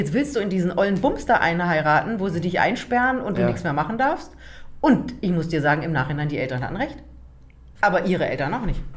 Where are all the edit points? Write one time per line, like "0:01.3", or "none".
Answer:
0:07.8